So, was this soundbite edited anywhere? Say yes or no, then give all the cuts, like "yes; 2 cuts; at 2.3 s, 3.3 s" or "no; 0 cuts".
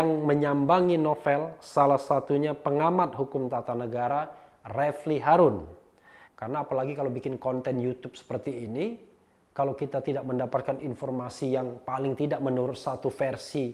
yes; 1 cut; at 6.3 s